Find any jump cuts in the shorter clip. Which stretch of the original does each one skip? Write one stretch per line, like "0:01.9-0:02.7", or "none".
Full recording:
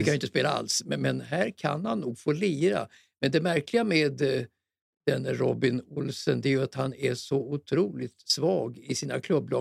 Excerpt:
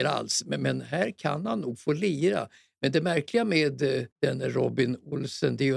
0:04.5-0:05.0